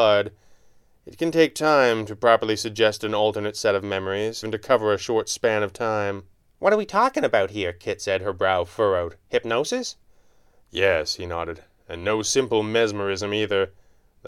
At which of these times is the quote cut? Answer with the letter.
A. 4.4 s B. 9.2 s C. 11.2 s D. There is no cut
A